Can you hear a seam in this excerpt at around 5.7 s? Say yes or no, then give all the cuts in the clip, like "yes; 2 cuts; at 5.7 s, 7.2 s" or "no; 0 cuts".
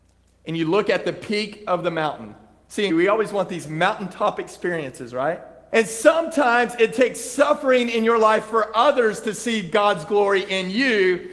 yes; 2 cuts; at 2.9 s, 5.7 s